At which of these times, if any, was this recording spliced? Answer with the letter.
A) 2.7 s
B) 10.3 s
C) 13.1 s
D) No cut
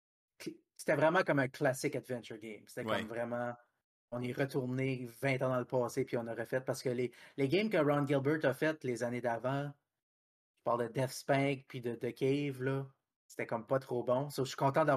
C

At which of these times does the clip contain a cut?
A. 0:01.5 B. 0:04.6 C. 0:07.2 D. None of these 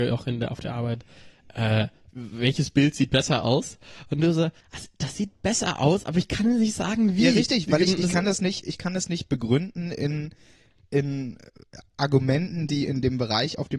B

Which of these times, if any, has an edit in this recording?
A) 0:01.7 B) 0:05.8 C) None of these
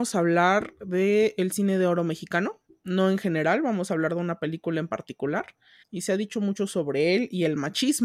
B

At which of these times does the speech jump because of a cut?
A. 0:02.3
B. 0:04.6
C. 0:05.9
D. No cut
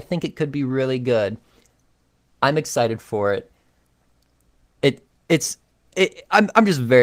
D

